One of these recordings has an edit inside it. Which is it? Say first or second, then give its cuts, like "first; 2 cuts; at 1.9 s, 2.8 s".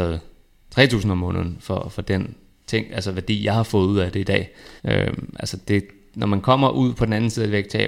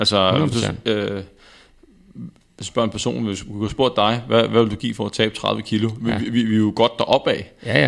first; 1 cut; at 4.8 s